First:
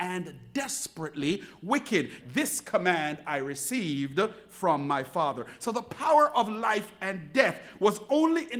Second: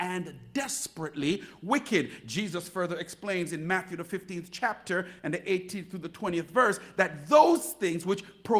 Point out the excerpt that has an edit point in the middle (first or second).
first